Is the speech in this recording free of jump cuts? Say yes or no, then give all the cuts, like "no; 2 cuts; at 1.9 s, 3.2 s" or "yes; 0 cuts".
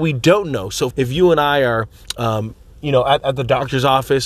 no; 1 cut; at 0.9 s